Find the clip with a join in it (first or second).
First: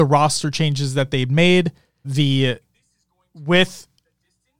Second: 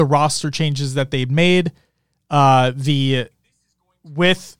first